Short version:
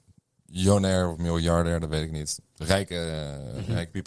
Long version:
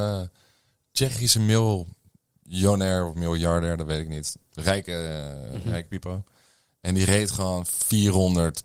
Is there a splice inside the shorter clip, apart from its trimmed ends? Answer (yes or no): no